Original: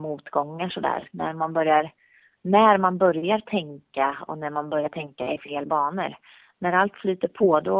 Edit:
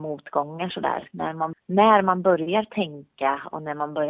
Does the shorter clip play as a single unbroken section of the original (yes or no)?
no